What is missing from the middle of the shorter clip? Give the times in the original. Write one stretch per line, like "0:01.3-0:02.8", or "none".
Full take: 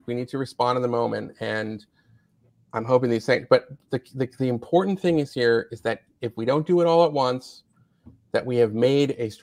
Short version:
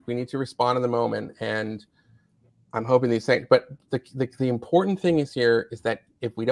none